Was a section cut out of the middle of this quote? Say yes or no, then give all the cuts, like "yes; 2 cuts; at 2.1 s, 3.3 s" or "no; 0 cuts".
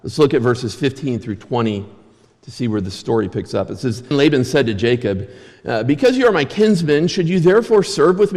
yes; 1 cut; at 4.1 s